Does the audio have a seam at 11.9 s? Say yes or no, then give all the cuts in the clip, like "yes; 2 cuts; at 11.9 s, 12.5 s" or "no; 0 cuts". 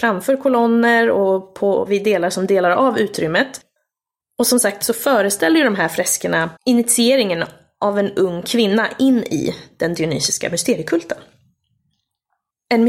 no; 2 cuts; at 4.2 s, 6.6 s